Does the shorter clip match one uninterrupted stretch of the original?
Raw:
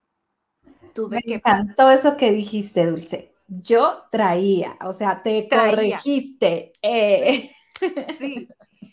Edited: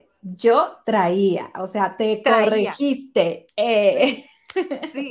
yes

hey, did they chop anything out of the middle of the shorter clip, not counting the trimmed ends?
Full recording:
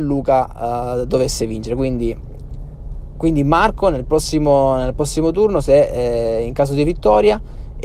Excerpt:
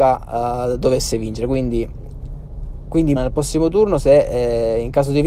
yes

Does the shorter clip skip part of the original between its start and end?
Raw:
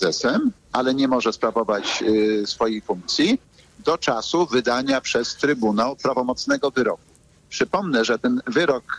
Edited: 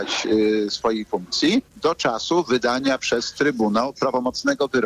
yes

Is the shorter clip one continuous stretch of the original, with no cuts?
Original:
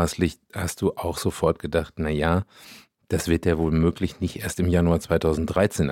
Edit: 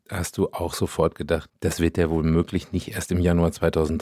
no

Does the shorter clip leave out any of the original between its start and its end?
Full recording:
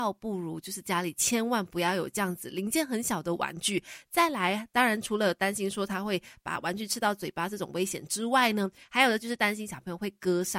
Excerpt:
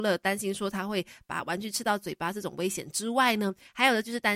no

